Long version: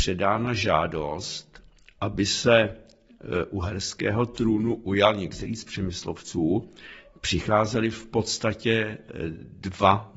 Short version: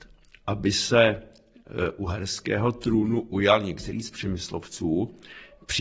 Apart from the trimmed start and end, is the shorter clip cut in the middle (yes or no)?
no